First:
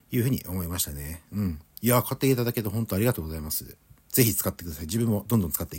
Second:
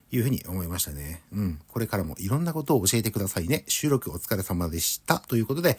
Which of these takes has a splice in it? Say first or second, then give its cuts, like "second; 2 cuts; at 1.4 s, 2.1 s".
second; 1 cut; at 1.7 s